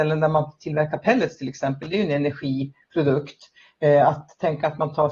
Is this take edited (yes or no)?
no